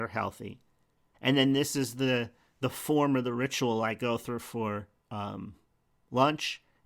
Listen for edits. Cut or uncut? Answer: cut